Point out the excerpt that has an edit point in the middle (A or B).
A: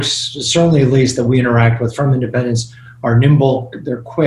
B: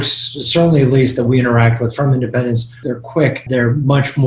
B